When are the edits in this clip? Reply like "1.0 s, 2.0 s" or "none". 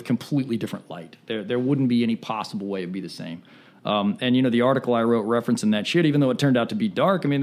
none